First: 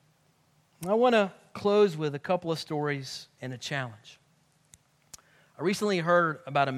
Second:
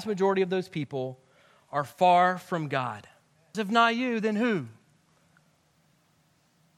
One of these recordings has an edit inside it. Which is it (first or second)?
second